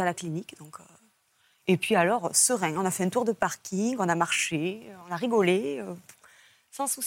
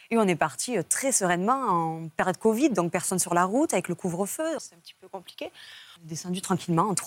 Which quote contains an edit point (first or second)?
second